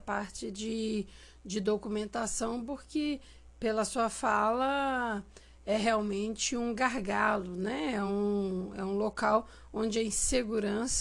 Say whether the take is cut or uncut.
uncut